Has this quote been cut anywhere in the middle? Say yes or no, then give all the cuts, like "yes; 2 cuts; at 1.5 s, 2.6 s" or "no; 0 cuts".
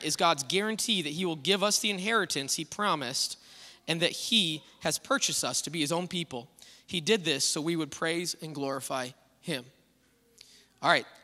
no; 0 cuts